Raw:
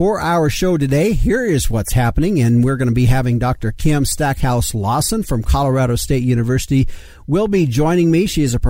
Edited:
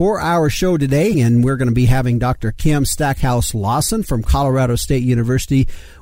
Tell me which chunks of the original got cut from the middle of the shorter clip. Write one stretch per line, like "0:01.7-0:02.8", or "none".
0:01.1-0:02.3